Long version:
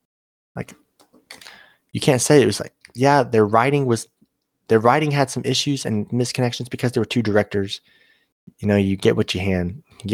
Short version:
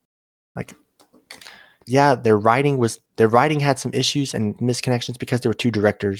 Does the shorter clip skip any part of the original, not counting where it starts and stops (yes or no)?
yes